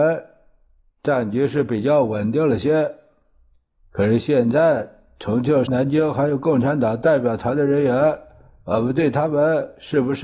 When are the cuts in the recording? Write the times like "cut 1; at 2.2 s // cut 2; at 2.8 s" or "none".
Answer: cut 1; at 5.7 s